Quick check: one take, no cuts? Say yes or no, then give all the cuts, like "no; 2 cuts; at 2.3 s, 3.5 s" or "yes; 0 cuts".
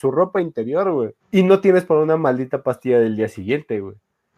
no; 1 cut; at 1.2 s